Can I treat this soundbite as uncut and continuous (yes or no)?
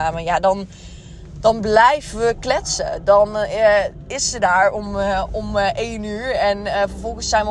yes